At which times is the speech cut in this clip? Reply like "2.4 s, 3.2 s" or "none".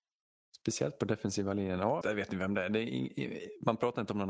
2.0 s